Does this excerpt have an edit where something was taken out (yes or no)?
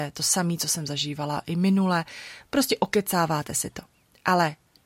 no